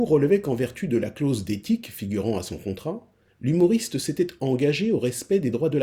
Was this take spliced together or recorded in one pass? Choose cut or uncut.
uncut